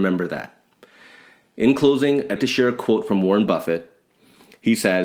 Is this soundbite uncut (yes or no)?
no